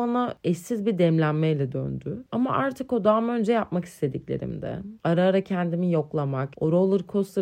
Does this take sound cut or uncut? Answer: cut